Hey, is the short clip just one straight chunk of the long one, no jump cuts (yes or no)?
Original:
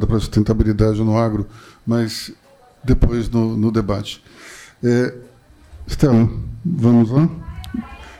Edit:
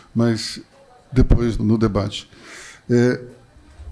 no